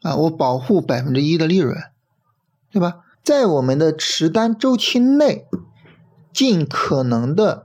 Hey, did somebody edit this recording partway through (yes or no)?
yes